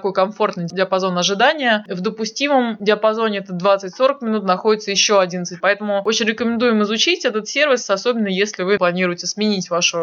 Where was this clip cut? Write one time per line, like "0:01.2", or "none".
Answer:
0:05.6
0:08.8